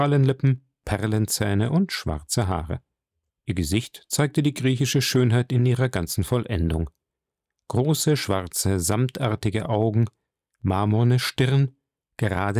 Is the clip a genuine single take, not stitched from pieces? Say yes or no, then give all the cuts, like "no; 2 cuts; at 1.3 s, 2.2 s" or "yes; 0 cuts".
no; 1 cut; at 3.3 s